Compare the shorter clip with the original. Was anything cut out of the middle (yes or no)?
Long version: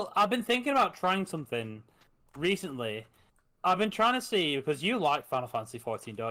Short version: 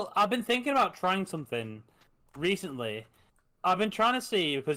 no